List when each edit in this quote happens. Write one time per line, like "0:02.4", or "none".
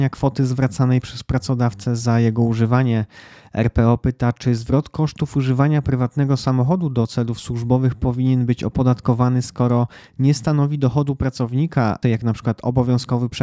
0:12.0